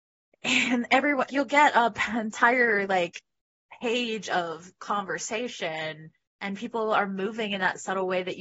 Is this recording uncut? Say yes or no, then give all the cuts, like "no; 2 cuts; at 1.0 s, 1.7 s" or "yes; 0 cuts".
no; 1 cut; at 1.3 s